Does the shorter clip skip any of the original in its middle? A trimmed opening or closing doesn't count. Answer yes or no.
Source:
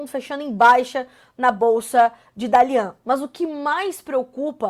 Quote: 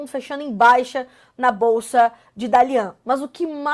no